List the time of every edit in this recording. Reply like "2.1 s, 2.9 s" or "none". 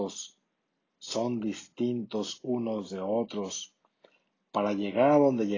none

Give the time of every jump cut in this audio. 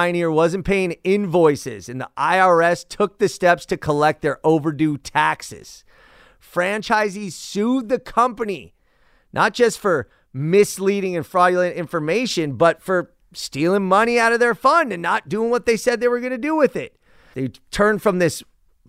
17.3 s

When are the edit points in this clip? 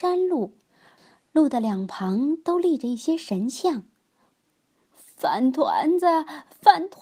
none

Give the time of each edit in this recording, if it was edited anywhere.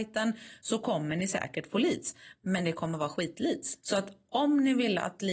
3.8 s

